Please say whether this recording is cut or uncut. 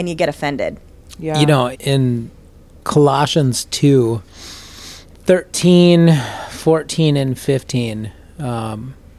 cut